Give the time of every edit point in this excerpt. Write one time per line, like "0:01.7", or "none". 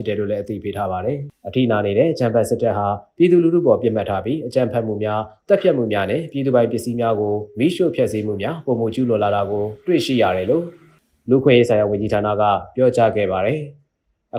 none